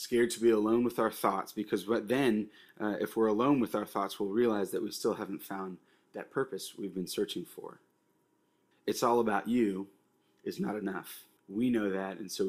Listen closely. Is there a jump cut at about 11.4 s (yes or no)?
yes